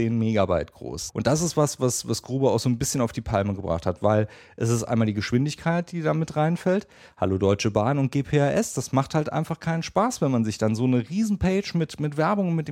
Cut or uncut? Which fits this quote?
cut